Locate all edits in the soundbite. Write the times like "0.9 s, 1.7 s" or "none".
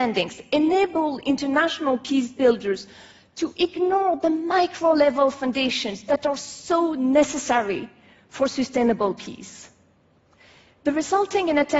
none